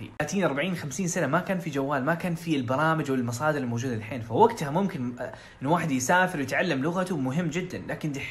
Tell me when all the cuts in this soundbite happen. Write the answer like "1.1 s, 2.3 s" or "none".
none